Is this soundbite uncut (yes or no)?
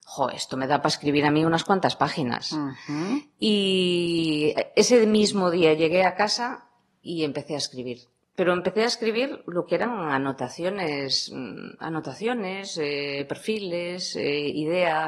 yes